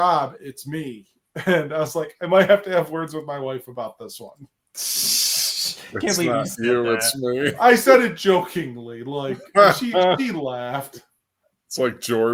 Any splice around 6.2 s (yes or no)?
no